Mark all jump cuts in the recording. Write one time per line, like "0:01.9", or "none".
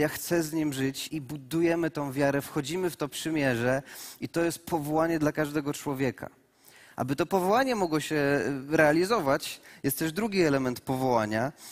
0:01.1

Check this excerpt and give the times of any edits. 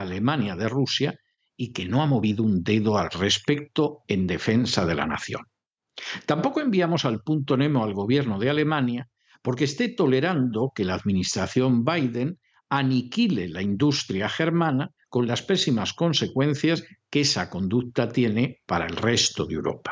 0:15.0

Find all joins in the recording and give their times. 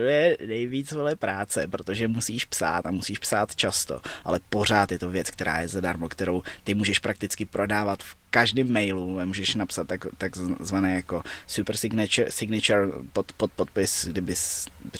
none

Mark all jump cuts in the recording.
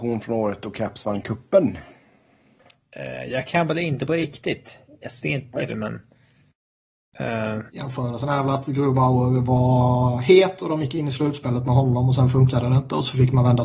0:05.7
0:07.7

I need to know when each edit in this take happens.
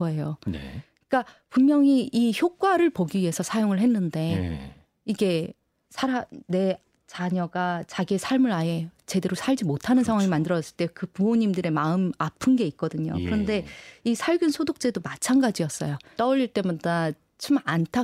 0:05.8
0:16.2

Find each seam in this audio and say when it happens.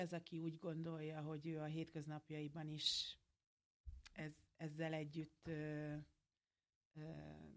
none

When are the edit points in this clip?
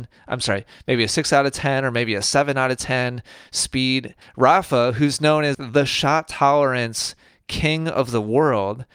0:04.2
0:05.5

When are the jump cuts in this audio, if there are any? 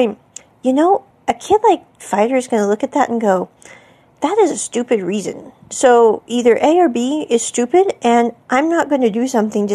none

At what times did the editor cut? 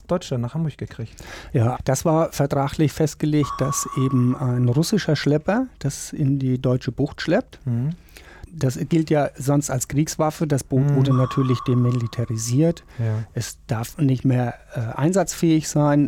0:01.8
0:08.5

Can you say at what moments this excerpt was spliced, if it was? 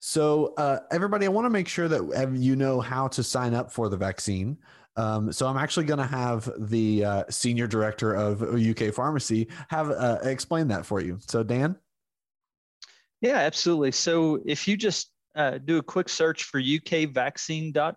none

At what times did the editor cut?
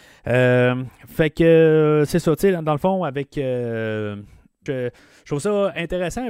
0:04.7

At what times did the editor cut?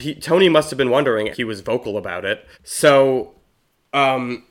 0:01.3
0:02.5

